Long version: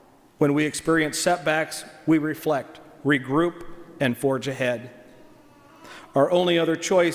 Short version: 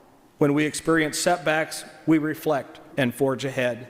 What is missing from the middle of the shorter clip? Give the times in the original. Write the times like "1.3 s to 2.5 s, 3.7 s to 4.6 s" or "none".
2.9 s to 3.9 s